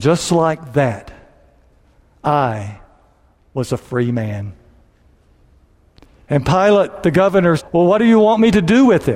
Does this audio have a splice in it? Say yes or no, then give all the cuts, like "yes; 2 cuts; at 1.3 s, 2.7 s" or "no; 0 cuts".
yes; 2 cuts; at 6.2 s, 7.6 s